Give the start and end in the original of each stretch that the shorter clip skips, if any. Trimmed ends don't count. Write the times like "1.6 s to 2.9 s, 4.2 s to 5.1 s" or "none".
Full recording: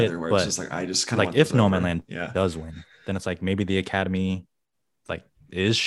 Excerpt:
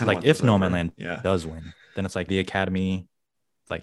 3.4 s to 3.7 s

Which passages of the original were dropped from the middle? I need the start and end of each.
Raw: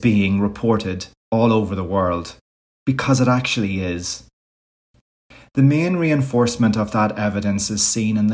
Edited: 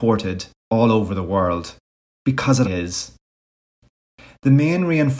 3.2 s to 3.8 s

